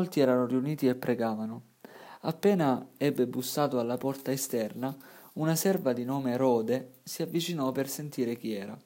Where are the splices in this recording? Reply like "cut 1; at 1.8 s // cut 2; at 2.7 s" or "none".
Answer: none